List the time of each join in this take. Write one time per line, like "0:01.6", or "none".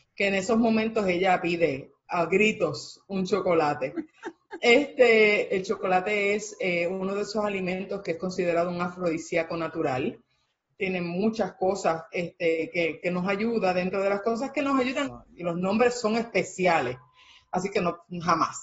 0:05.5
0:15.0